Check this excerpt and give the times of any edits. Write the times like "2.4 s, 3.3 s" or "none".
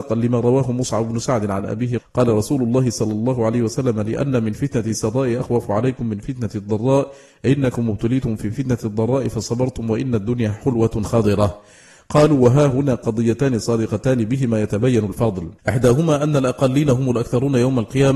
2.0 s, 15.6 s

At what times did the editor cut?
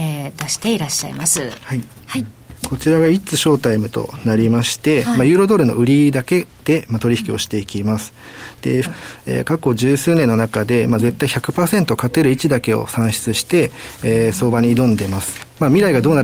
8.8 s

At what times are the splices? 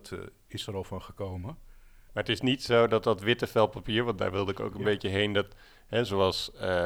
2.1 s

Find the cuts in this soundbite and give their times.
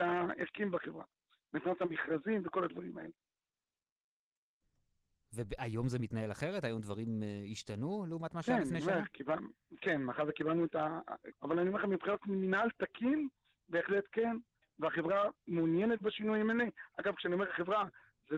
11.3 s, 14.6 s

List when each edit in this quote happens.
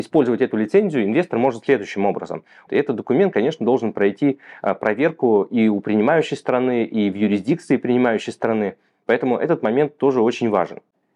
2.7 s

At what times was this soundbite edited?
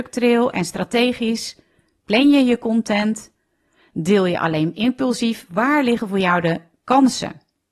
none

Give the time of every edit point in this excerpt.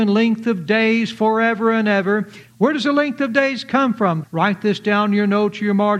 2.5 s, 4.2 s

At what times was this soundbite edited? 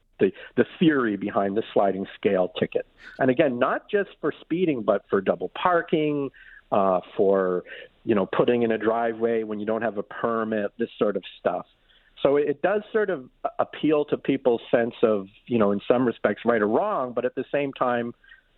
3.2 s

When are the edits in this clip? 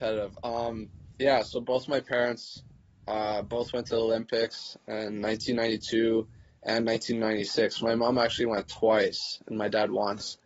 none

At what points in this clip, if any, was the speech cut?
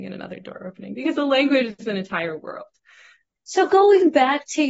3.3 s

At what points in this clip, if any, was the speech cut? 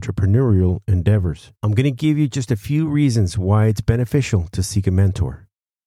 1.6 s

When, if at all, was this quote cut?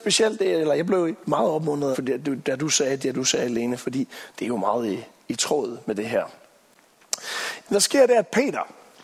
1.9 s, 7.7 s

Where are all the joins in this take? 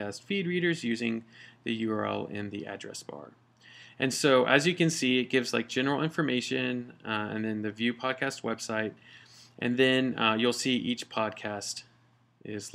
none

